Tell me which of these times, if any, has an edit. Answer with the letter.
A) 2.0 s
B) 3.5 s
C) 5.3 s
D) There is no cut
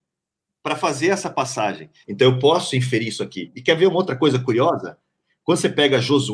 A